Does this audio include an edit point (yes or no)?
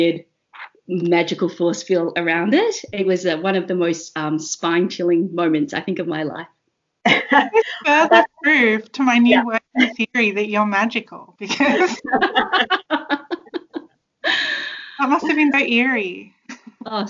yes